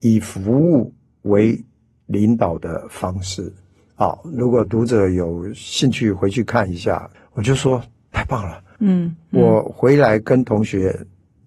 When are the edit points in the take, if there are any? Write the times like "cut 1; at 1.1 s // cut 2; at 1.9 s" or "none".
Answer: cut 1; at 7.1 s // cut 2; at 8.8 s